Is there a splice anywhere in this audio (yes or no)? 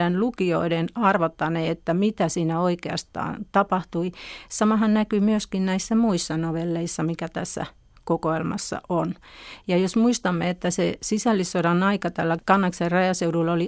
no